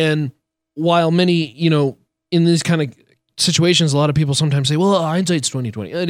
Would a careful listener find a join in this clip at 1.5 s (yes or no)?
no